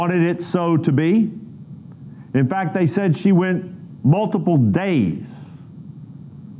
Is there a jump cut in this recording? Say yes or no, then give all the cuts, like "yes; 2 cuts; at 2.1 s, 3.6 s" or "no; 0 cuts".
no; 0 cuts